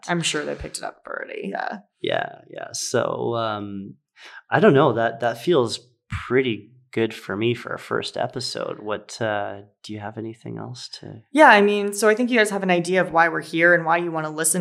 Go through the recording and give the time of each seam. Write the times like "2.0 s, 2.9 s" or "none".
none